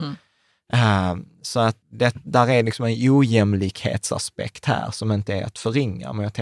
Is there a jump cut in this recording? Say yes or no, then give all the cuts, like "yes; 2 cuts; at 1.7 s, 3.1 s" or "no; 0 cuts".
yes; 1 cut; at 1.8 s